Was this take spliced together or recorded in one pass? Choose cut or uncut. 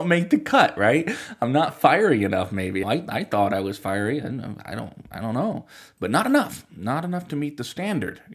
cut